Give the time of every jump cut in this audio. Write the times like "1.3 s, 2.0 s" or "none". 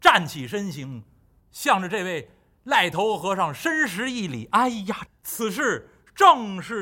1.4 s, 5.1 s

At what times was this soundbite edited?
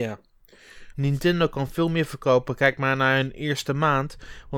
0.9 s

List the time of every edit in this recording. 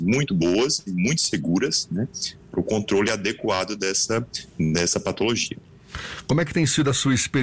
none

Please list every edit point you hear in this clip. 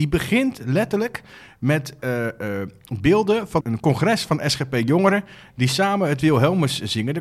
3.6 s

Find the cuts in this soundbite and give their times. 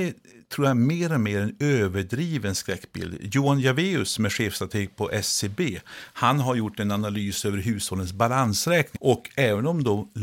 8.9 s

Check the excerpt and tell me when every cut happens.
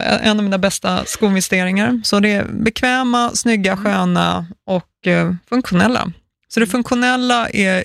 none

